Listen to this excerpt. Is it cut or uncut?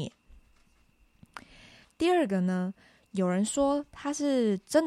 cut